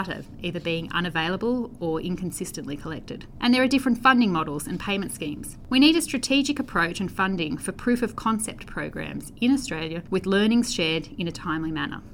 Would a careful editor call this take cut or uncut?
uncut